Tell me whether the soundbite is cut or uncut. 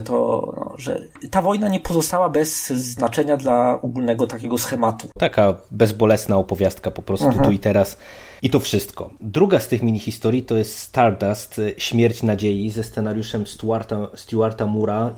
cut